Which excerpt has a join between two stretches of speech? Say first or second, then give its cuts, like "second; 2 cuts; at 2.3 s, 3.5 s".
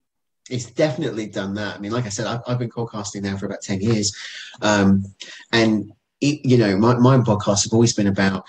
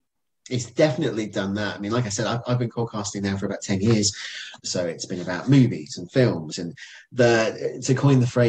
second; 1 cut; at 4.6 s